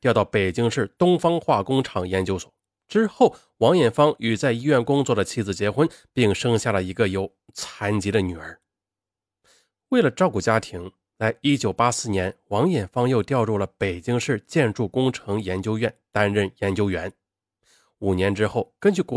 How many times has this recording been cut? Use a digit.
0